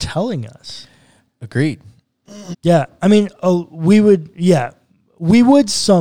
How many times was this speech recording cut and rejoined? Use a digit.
1